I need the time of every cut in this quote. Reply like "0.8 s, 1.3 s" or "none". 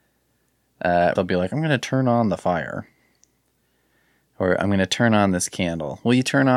1.2 s